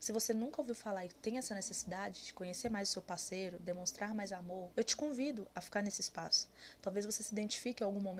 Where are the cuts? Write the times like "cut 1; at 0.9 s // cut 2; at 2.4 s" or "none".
cut 1; at 4.7 s